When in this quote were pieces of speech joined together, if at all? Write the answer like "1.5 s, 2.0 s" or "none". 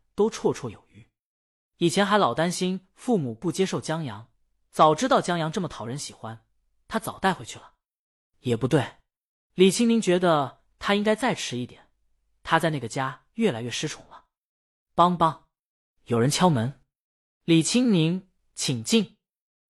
none